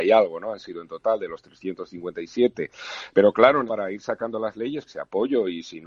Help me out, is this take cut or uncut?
cut